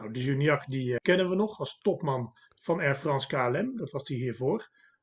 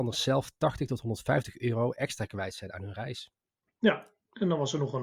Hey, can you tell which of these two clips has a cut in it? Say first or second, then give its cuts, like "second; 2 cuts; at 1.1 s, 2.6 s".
first; 1 cut; at 1.0 s